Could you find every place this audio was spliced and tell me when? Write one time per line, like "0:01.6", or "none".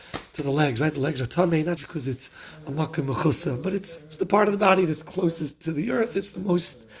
0:01.8
0:04.0